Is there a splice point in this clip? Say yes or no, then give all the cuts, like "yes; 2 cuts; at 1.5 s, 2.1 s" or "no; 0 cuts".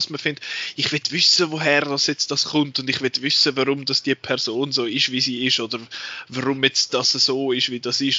no; 0 cuts